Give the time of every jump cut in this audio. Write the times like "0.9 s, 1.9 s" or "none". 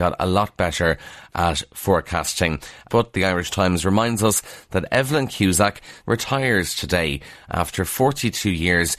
2.9 s, 6.0 s